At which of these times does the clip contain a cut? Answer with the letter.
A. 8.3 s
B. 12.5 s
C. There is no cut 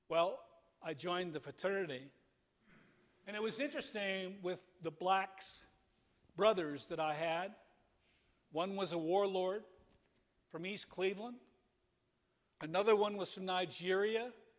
B